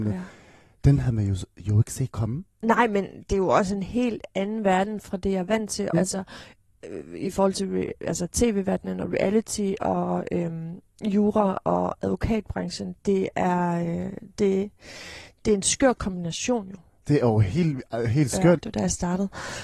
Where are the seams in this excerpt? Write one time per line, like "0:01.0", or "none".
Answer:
0:05.9
0:18.6

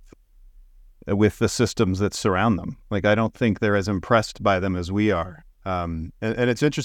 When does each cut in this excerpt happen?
none

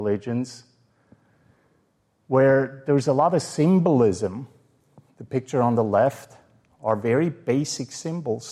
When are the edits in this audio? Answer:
none

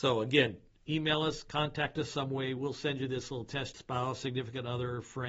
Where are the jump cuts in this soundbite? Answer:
0:03.7

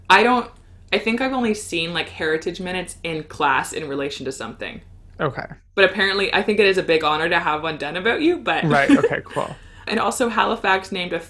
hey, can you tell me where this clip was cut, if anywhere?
none

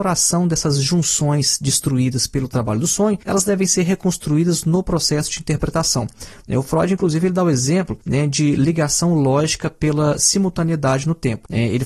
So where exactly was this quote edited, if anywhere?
none

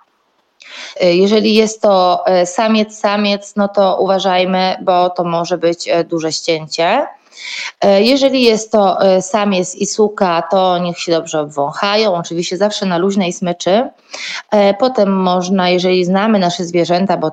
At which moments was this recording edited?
0:01.0

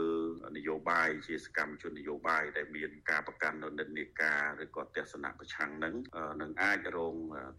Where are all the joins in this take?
none

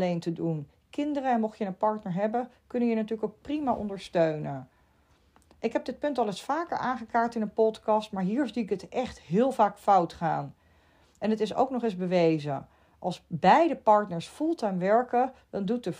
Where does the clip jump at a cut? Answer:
none

